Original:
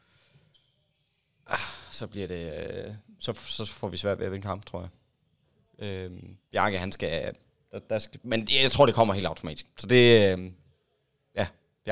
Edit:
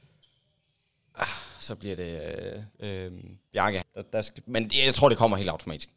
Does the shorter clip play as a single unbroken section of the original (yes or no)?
no